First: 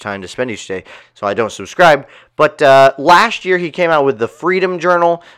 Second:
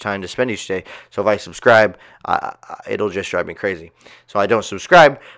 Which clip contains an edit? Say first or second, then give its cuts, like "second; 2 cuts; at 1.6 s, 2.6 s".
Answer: first; 1 cut; at 1.0 s